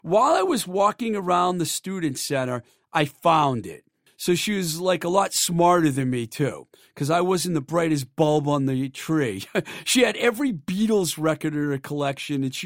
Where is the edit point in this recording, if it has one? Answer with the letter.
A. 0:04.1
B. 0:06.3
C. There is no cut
A